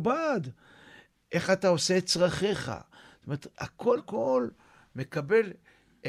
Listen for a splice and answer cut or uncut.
cut